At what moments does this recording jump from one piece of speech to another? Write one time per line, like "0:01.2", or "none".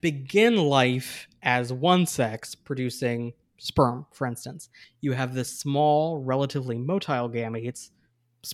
0:04.8